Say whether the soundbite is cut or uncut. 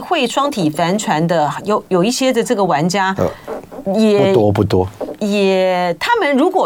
uncut